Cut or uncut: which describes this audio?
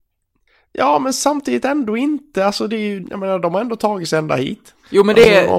cut